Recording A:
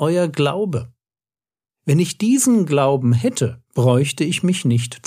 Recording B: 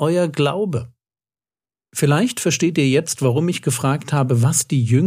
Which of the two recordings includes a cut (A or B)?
A